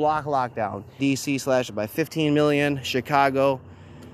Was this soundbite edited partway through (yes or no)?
yes